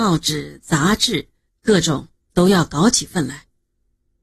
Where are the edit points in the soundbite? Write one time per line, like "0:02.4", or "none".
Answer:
0:01.5